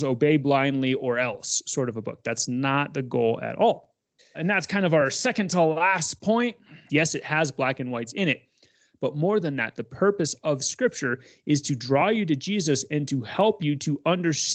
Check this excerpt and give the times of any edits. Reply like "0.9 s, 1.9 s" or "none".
4.2 s, 6.9 s

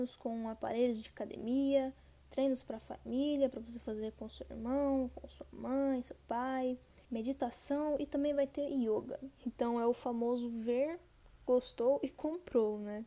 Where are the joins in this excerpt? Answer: 7.0 s, 9.4 s

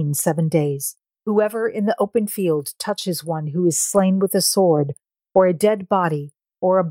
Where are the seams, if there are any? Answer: 1.1 s

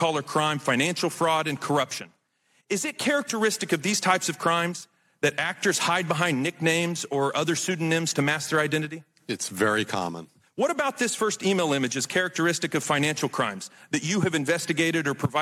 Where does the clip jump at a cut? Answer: none

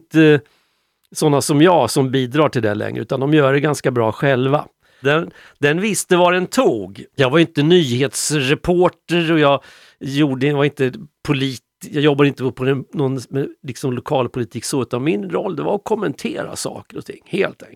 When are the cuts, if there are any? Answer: 5.0 s, 7.1 s

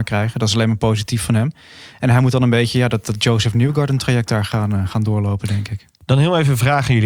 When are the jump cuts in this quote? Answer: none

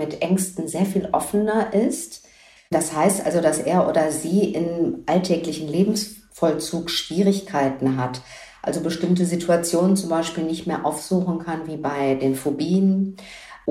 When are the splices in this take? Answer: 2.6 s

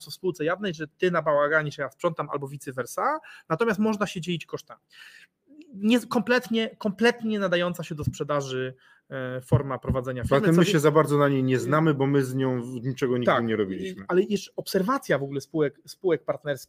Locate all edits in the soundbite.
none

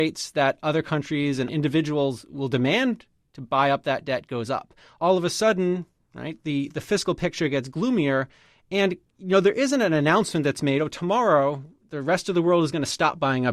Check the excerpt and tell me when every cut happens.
none

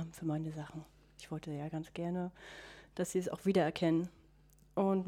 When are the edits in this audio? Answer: none

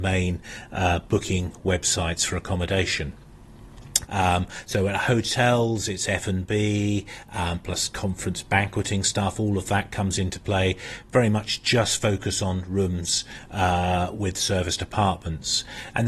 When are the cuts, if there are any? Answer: 4.1 s

